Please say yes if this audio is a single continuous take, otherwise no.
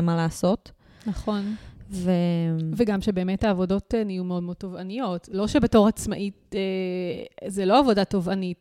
yes